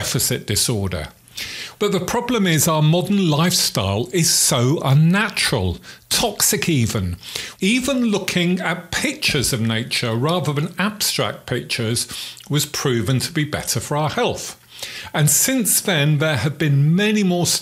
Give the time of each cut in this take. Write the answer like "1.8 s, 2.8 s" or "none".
1.8 s, 7.6 s